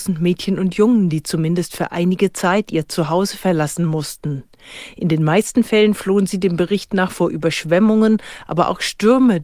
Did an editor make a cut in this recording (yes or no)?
no